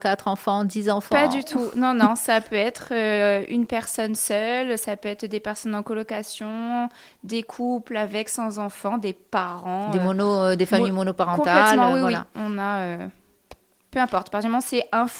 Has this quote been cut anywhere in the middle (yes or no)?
no